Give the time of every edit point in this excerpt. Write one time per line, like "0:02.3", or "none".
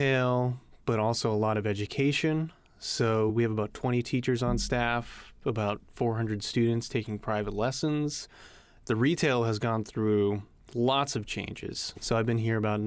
0:11.9